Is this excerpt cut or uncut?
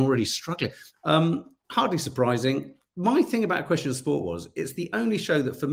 cut